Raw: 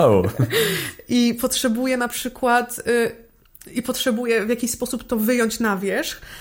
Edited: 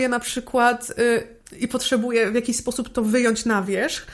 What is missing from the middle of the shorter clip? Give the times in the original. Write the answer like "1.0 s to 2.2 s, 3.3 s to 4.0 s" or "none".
3.3 s to 3.6 s